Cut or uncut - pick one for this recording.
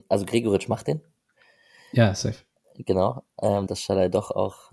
cut